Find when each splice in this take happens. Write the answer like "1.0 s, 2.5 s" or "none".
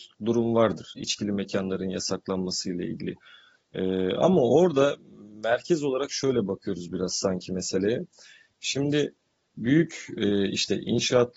none